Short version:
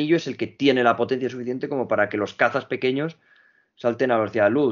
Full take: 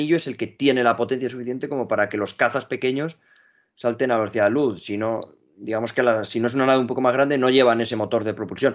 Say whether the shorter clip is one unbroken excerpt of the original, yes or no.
yes